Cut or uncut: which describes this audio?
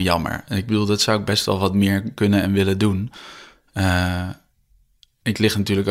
uncut